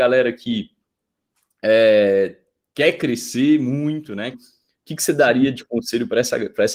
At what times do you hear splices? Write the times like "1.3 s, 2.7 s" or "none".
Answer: 4.3 s